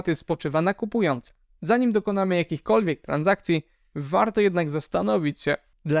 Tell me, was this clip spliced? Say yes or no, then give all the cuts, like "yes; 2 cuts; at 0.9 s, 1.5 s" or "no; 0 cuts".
no; 0 cuts